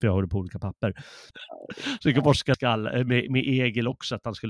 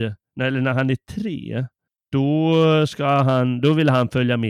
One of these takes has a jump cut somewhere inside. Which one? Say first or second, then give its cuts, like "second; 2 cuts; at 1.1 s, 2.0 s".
first; 2 cuts; at 1.3 s, 2.5 s